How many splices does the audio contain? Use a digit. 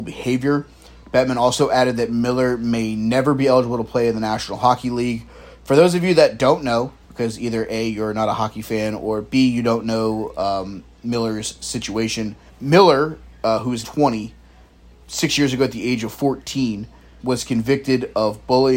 3